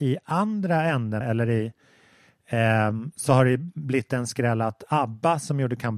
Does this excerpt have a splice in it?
yes; 1 cut; at 1.2 s

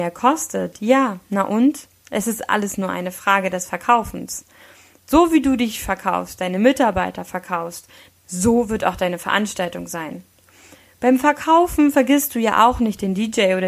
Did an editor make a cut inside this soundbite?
yes; 1 cut; at 8.1 s

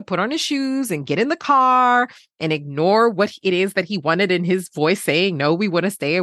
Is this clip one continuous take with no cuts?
yes; 0 cuts

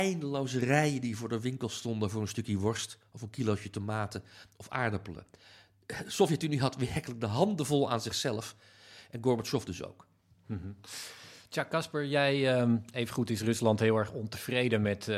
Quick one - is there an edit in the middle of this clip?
no; 0 cuts

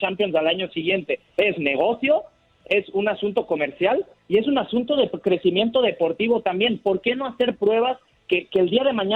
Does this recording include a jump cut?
no; 0 cuts

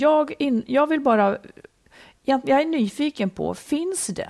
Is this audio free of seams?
yes; 0 cuts

